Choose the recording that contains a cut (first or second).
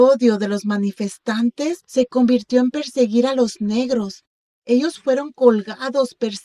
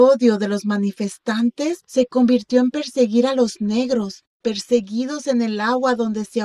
second